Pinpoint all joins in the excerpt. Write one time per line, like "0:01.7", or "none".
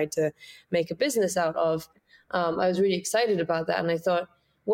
none